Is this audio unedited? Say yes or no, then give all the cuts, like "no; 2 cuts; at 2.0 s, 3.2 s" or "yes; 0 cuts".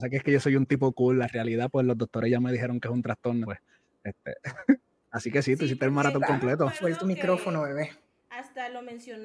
no; 2 cuts; at 3.4 s, 5.0 s